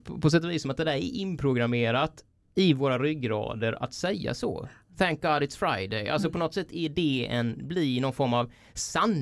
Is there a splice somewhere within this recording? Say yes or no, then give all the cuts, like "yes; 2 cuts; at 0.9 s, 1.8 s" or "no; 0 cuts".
no; 0 cuts